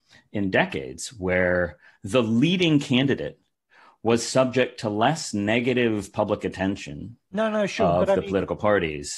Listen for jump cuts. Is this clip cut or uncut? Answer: cut